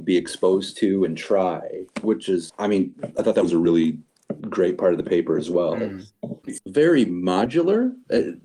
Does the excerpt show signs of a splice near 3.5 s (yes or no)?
no